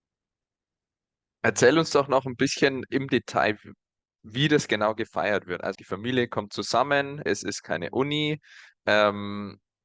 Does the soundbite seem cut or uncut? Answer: cut